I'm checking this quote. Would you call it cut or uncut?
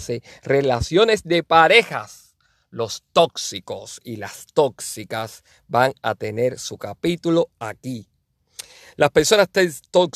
uncut